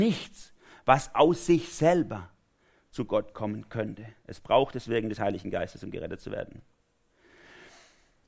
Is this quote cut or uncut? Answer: uncut